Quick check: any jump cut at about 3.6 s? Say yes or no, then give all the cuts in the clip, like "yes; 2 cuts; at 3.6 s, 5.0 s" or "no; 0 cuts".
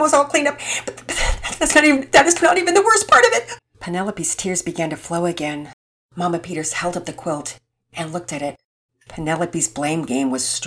yes; 2 cuts; at 3.6 s, 8.9 s